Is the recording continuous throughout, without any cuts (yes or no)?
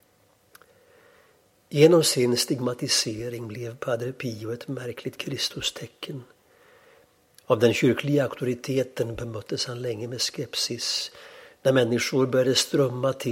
yes